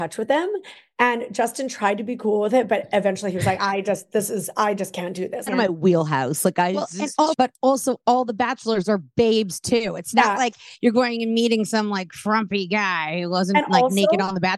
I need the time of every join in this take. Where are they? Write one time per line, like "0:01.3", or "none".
0:05.5
0:07.3